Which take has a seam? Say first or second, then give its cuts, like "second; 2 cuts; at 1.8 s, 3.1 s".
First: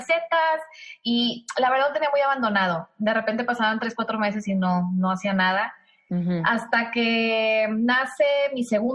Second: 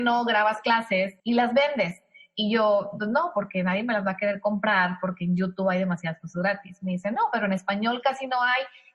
second; 1 cut; at 1.2 s